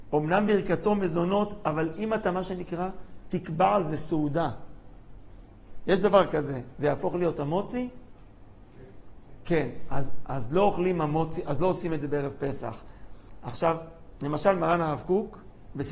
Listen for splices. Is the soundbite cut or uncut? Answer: uncut